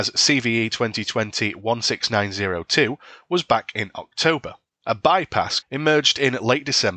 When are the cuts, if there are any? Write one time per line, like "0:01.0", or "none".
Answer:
0:05.6